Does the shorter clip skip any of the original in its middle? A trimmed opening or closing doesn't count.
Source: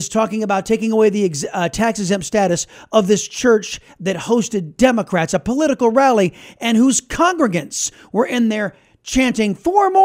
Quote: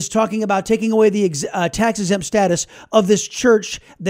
no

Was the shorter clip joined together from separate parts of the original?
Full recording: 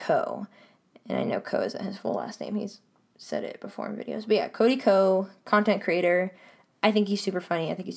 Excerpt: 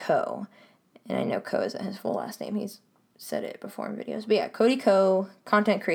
no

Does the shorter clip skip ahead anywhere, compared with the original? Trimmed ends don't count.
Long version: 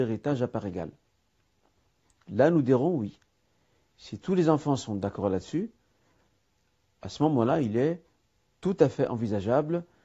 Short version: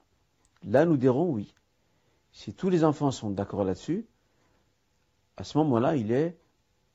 no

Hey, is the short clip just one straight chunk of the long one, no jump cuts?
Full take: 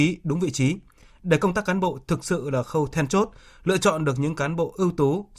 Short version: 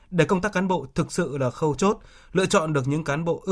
no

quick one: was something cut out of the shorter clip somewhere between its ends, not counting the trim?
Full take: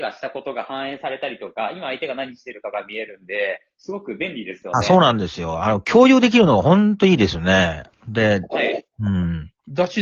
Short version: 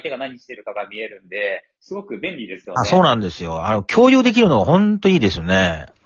no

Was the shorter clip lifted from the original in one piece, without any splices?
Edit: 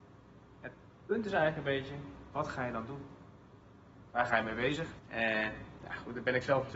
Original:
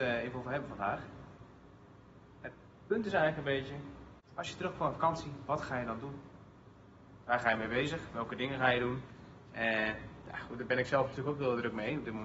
no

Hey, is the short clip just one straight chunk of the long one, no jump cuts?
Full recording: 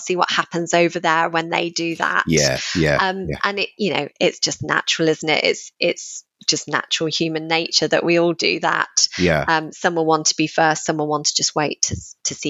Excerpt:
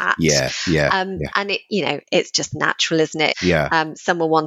no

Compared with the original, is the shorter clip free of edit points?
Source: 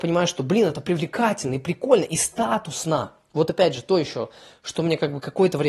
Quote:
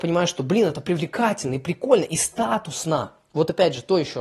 yes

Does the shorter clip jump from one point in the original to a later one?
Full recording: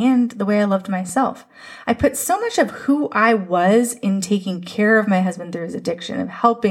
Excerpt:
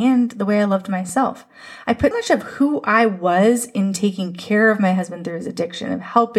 yes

